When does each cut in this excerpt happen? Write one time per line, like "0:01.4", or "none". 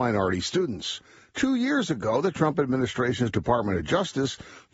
none